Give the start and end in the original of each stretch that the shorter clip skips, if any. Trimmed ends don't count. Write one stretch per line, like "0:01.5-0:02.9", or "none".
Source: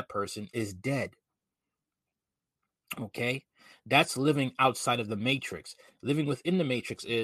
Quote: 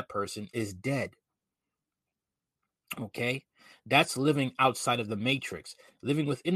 none